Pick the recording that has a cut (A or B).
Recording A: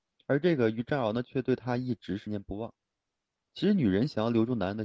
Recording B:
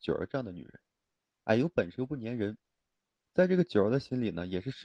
A